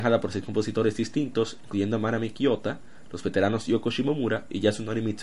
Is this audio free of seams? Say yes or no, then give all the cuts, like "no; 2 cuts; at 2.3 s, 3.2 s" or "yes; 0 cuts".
yes; 0 cuts